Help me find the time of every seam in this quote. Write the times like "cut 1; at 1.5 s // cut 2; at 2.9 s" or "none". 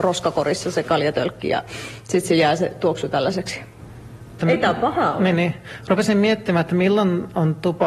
cut 1; at 4.4 s